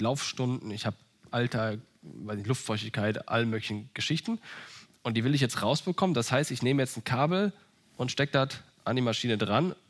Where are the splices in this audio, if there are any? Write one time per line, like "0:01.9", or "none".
none